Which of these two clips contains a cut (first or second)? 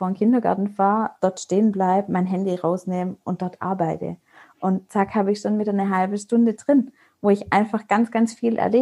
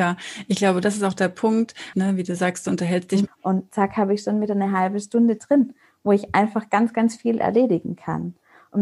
second